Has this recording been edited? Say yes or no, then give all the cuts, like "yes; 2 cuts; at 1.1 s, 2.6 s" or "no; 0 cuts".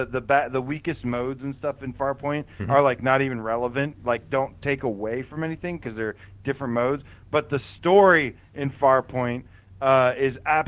no; 0 cuts